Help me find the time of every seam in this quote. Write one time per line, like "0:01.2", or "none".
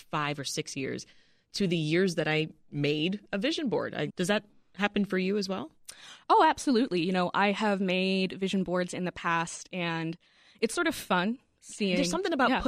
0:04.1